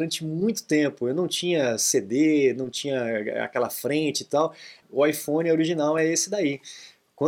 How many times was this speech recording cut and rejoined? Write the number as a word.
one